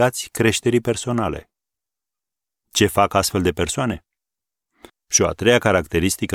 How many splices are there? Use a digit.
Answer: 1